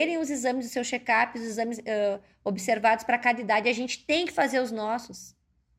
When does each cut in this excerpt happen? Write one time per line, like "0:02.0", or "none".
none